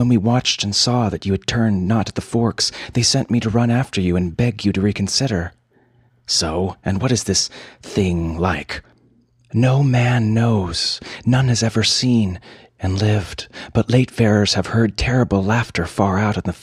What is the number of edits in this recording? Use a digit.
1